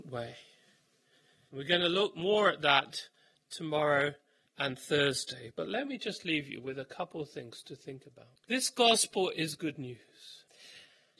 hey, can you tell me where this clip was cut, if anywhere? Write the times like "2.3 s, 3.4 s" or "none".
none